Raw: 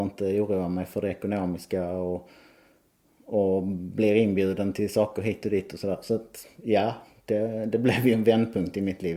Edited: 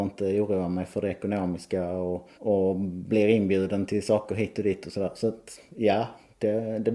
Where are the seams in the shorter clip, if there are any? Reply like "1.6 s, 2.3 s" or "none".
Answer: 2.3 s